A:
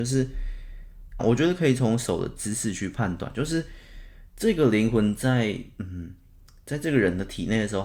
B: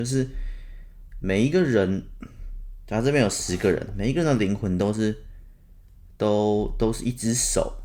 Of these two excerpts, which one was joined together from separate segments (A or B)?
A